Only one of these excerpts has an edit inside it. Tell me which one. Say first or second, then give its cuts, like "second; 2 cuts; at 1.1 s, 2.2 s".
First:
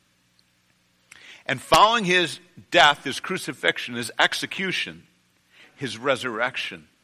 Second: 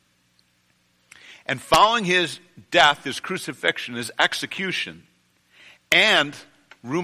first; 1 cut; at 5.6 s